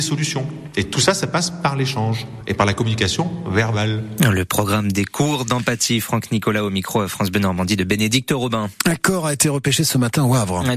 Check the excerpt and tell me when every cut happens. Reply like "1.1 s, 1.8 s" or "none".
none